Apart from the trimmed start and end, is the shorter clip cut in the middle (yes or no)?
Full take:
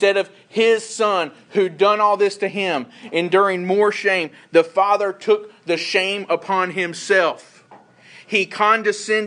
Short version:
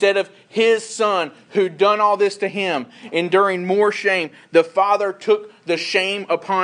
no